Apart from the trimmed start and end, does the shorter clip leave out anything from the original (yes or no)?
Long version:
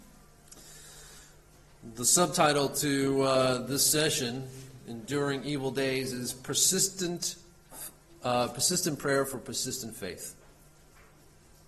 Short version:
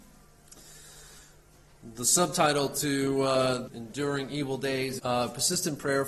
yes